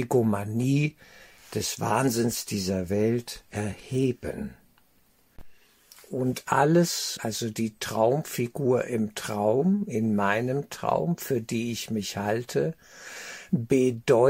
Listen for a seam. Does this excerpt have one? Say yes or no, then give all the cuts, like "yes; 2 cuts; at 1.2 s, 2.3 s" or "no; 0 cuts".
yes; 1 cut; at 7.2 s